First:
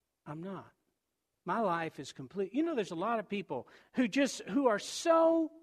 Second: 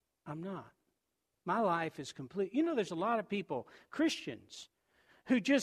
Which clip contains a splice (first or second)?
first